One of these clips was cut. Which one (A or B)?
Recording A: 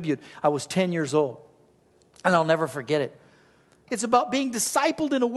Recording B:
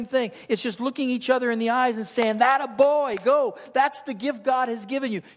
A